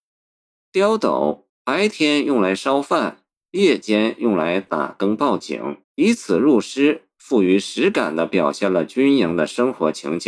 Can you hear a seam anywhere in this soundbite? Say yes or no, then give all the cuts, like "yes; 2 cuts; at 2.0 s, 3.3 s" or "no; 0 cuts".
yes; 2 cuts; at 1.5 s, 5.8 s